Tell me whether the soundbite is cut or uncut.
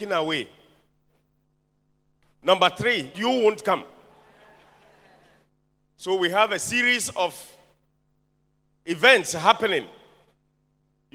cut